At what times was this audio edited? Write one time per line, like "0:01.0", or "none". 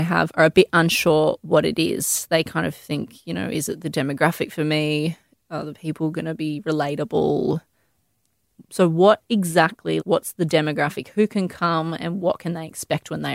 0:10.0

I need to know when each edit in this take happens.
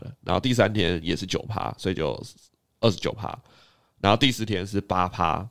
none

